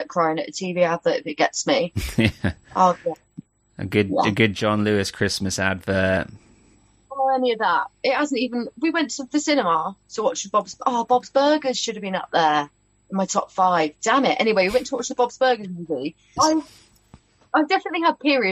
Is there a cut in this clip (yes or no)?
yes